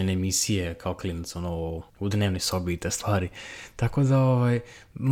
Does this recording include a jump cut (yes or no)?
yes